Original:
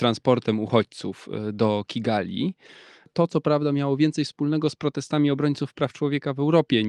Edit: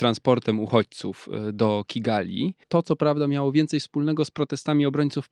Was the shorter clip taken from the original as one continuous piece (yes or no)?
no